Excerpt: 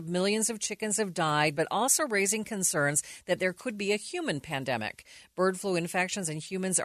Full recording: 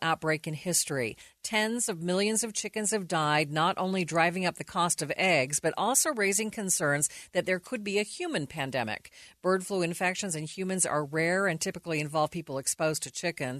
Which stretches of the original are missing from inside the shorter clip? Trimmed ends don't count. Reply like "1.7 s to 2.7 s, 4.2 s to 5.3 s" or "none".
3.5 s to 5.6 s